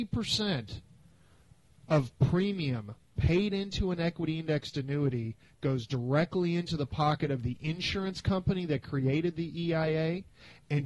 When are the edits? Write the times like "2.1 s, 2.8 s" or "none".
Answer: none